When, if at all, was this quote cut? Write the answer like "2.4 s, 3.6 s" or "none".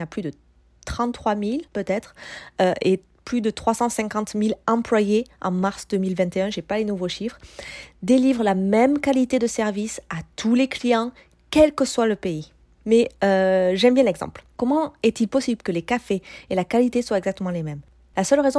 1.7 s, 12.8 s, 14.5 s